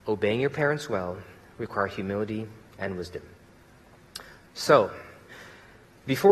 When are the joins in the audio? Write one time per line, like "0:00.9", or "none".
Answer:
none